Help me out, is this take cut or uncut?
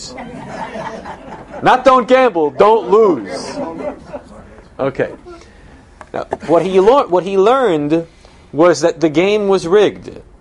uncut